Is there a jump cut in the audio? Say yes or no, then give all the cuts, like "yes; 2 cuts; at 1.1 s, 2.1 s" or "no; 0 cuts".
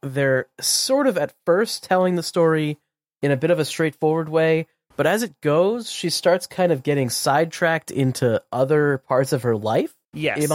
no; 0 cuts